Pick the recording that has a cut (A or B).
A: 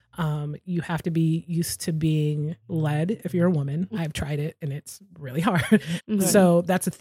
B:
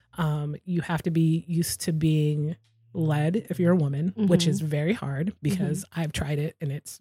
A